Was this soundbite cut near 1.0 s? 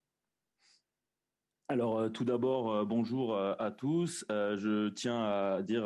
no; 0 cuts

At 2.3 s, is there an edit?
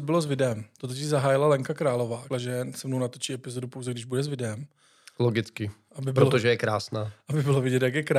yes; 1 cut; at 2.3 s

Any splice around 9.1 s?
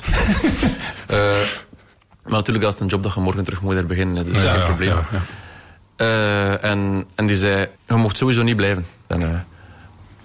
yes; 2 cuts; at 7.8 s, 9.1 s

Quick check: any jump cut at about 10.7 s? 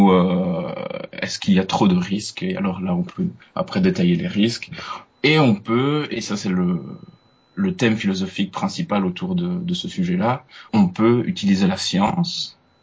yes; 2 cuts; at 5.2 s, 10.7 s

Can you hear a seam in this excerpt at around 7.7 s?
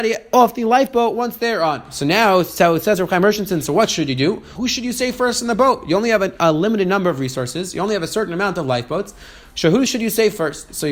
no; 2 cuts; at 4.6 s, 9.9 s

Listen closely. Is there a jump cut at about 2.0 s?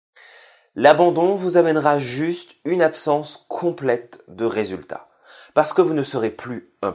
no; 0 cuts

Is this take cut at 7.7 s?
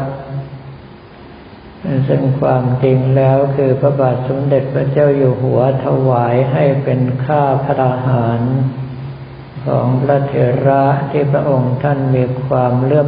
yes; 1 cut; at 7.7 s

